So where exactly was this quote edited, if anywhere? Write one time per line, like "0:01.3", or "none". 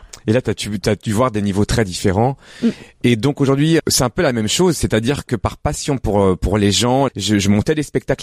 0:03.8
0:07.1